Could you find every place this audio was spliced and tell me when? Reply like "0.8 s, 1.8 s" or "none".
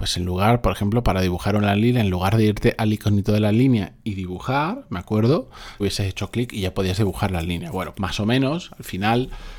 5.8 s, 7.9 s

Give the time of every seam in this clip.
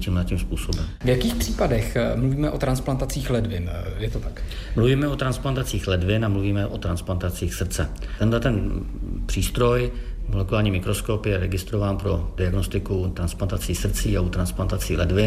none

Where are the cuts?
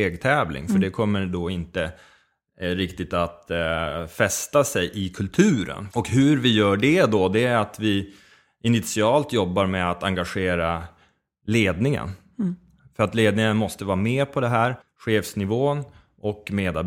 5.9 s, 14.8 s

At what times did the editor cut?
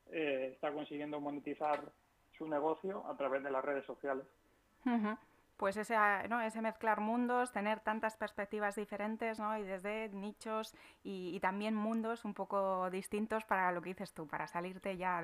none

